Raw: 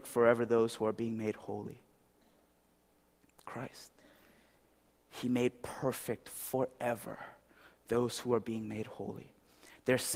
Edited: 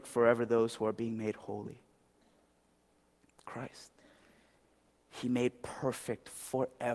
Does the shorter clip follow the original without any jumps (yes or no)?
yes